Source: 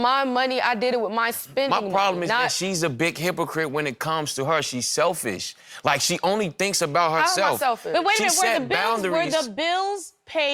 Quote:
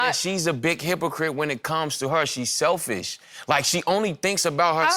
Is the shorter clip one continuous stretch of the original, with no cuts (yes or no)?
yes